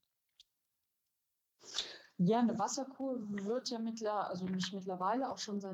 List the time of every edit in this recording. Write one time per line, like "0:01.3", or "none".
none